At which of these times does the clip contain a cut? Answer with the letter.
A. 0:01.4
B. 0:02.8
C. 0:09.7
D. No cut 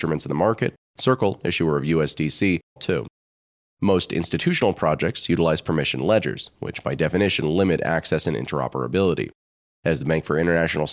B